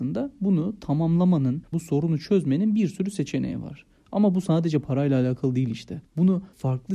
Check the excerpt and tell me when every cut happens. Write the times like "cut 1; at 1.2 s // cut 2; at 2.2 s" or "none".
cut 1; at 1.7 s